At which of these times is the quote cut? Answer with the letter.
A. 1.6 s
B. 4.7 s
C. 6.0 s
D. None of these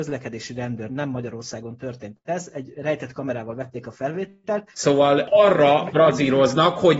B